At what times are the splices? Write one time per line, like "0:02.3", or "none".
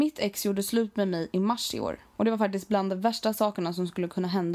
none